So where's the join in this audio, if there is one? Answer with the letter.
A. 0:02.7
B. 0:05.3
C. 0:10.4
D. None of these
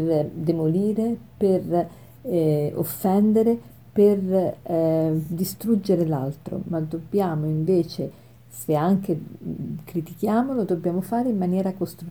D